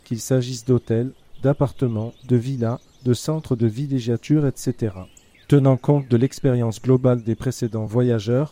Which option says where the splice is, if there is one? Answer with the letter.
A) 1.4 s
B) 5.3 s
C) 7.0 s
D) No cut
B